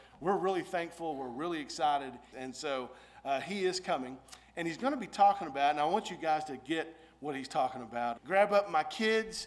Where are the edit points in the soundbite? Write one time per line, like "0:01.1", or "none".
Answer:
0:02.3
0:08.2